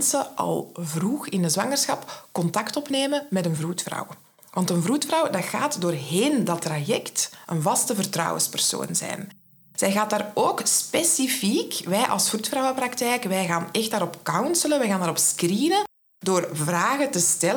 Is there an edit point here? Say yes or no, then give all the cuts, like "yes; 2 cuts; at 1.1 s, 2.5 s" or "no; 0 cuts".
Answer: no; 0 cuts